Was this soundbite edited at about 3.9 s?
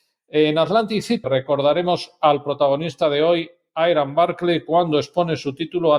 no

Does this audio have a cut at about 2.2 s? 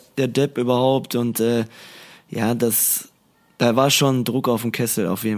no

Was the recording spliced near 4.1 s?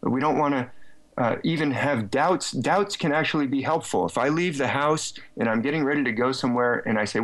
no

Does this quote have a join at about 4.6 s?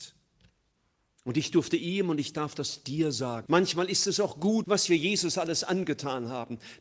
yes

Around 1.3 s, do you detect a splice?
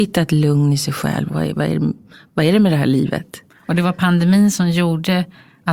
yes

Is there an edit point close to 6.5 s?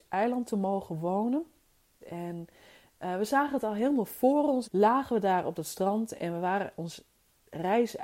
no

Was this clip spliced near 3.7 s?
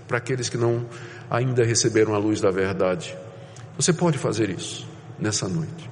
yes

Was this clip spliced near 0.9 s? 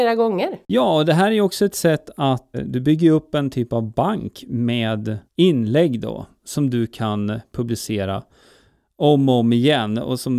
no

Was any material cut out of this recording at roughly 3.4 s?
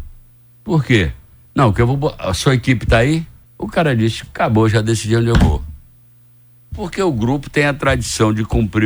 yes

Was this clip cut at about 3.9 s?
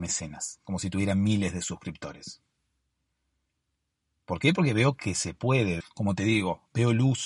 no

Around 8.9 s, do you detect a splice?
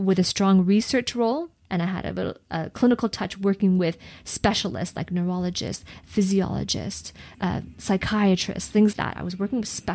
yes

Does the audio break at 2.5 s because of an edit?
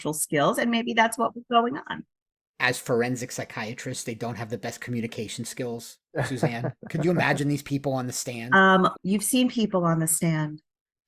no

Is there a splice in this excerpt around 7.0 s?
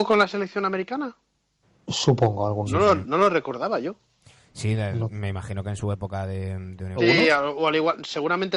yes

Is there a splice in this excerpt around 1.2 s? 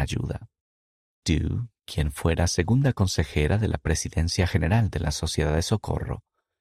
yes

